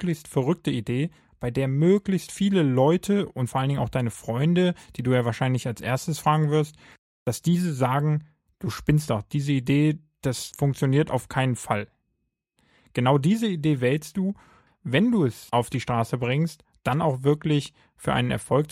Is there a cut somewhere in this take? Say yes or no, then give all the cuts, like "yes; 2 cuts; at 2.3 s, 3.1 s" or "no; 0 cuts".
yes; 1 cut; at 14.7 s